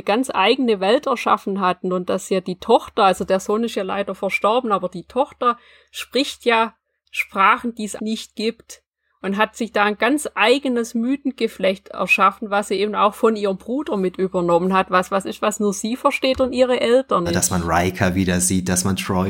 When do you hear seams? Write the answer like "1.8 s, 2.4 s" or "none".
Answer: 8.0 s, 17.3 s